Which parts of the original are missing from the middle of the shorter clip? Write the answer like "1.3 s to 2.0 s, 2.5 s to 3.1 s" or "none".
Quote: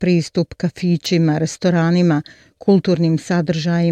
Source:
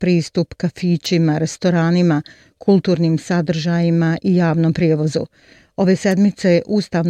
none